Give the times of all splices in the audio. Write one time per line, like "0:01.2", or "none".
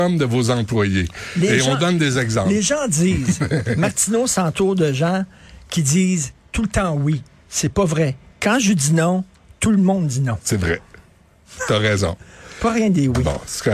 none